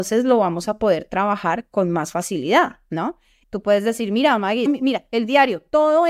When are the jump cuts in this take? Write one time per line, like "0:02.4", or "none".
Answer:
0:03.4
0:04.7

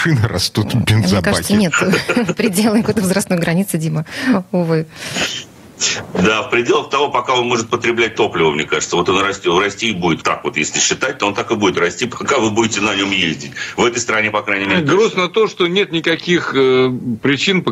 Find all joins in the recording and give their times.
0:10.2

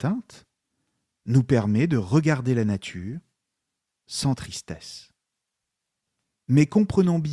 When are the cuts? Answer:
none

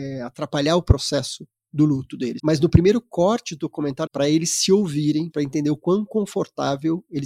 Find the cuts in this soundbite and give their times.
0:02.4
0:04.1
0:05.3

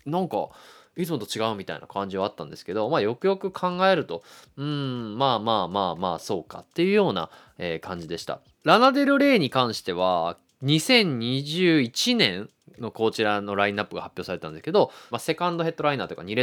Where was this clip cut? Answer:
0:08.5
0:15.1

